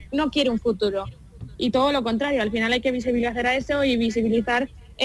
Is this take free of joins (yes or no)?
yes